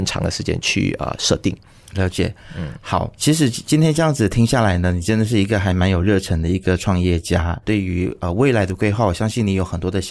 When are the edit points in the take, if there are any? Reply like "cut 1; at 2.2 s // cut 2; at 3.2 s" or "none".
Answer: cut 1; at 3.1 s // cut 2; at 7.6 s